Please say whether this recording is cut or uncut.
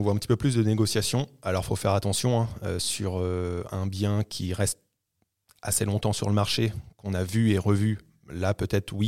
uncut